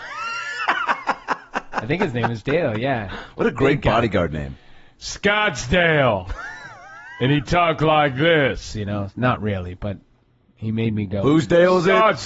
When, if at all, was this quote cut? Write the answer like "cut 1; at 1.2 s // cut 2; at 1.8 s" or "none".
none